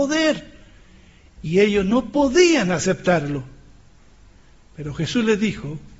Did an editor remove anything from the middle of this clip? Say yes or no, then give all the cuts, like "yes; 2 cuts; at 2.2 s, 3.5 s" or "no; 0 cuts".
no; 0 cuts